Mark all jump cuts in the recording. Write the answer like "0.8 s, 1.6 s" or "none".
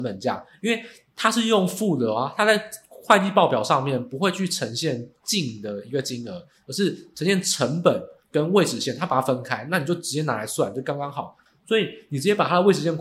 11.5 s